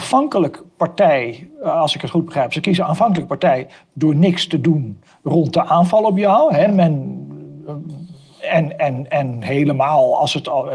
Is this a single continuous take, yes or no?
yes